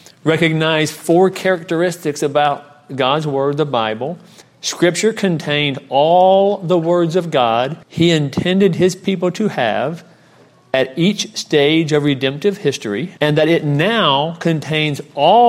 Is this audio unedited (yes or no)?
no